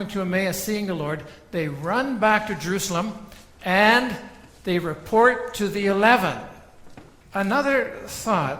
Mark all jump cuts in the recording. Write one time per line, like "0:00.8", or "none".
0:07.2